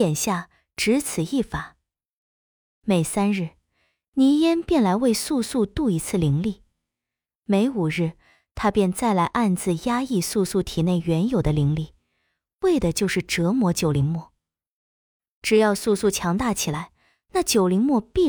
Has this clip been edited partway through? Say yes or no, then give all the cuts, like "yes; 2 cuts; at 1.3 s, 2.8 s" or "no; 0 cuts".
no; 0 cuts